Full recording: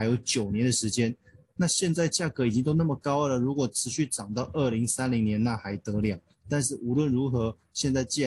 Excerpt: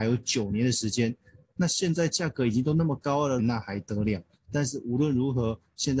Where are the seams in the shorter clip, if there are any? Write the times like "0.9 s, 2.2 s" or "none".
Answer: 3.4 s